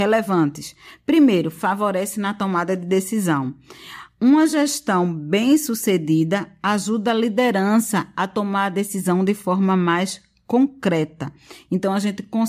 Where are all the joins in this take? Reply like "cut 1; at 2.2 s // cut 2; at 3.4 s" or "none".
none